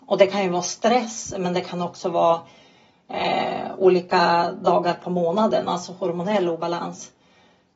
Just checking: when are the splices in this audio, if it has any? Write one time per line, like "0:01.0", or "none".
none